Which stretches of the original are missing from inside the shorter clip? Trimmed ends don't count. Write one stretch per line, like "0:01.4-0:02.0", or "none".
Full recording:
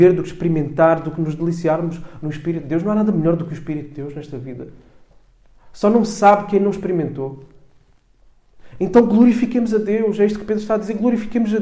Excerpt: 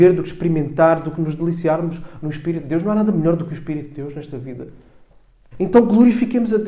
0:05.5-0:08.7